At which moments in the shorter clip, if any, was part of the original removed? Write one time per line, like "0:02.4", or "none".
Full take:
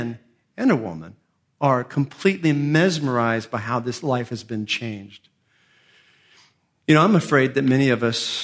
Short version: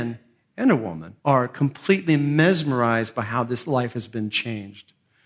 0:01.2